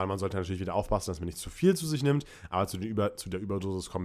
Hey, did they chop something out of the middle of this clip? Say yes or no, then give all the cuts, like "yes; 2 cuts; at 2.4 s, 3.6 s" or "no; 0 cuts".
no; 0 cuts